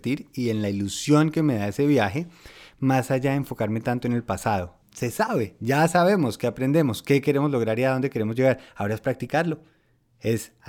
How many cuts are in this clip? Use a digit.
1